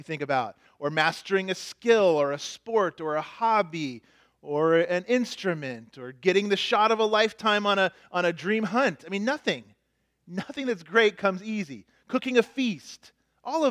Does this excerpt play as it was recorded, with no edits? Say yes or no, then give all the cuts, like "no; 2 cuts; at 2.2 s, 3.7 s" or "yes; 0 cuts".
yes; 0 cuts